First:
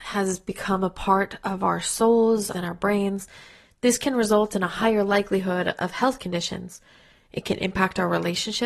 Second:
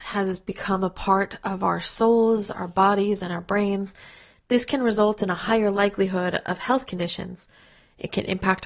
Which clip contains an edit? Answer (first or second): first